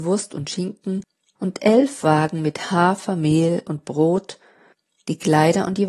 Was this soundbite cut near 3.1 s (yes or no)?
no